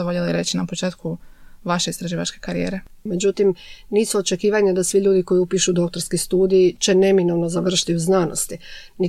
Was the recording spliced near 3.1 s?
yes; 1 cut; at 3.1 s

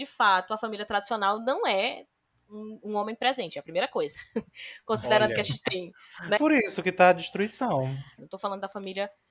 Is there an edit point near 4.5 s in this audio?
no; 2 cuts; at 6.4 s, 8.2 s

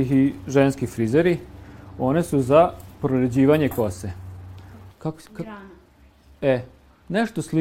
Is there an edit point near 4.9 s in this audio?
yes; 1 cut; at 4.9 s

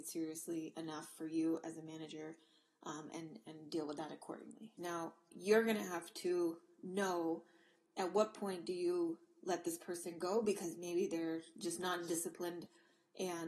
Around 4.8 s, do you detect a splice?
yes; 1 cut; at 4.8 s

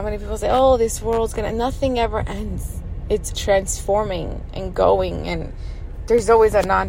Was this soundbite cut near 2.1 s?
no; 1 cut; at 3.3 s

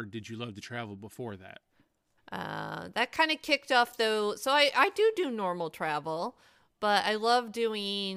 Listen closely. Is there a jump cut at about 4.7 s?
no; 1 cut; at 2.2 s

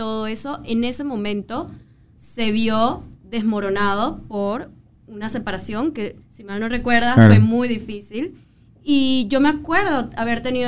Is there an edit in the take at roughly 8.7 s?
no; 1 cut; at 6.2 s

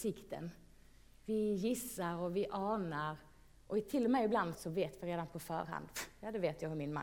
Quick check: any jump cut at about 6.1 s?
no; 1 cut; at 4.5 s

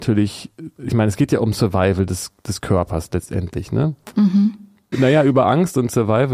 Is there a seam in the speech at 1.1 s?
no; 1 cut; at 4.9 s

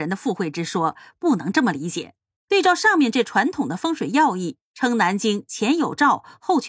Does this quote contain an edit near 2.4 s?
yes; 1 cut; at 2.4 s

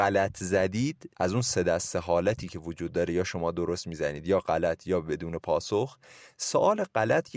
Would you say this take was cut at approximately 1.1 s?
yes; 1 cut; at 1.1 s

